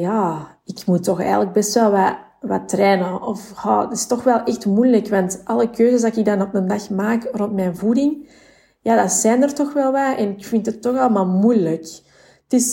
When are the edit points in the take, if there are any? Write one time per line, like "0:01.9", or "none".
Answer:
none